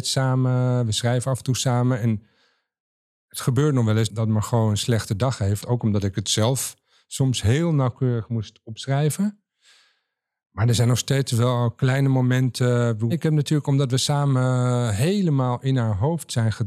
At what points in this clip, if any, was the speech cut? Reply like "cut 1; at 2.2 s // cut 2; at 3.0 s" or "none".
cut 1; at 5.6 s // cut 2; at 13.1 s